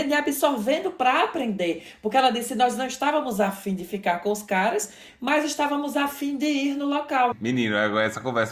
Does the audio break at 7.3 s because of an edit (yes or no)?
yes